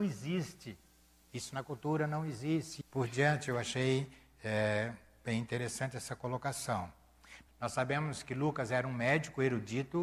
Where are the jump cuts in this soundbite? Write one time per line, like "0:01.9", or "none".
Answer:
0:01.2
0:02.8
0:07.5

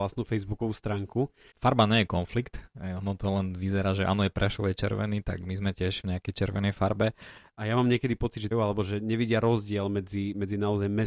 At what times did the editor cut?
0:01.5
0:07.5
0:08.5

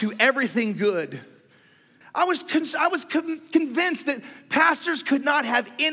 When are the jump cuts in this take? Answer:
0:02.0

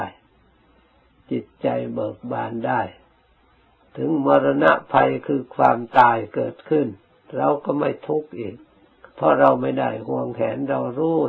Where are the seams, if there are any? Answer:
0:09.1

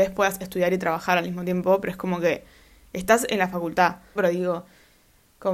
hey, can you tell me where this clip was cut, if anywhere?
0:04.2

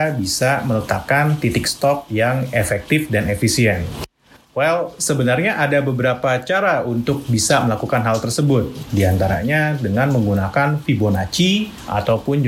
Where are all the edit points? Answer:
none

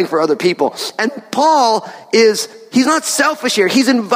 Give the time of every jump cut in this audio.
none

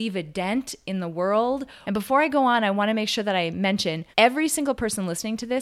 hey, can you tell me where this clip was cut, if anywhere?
0:01.8
0:04.1

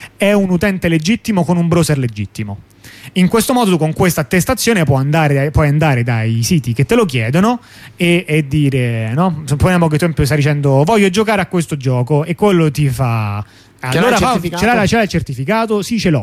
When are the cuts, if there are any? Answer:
none

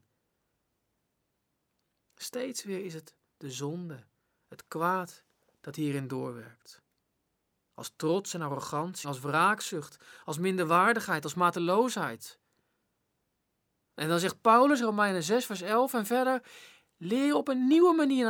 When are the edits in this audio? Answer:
0:09.0

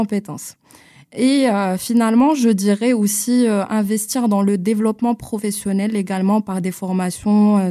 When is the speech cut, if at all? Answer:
none

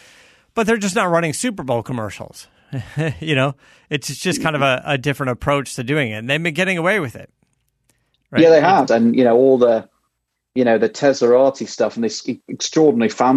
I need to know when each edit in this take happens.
0:08.9

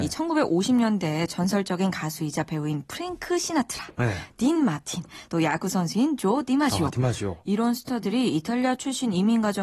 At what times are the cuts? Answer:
none

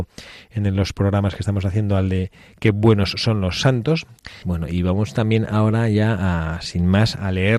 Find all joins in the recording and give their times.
0:04.4

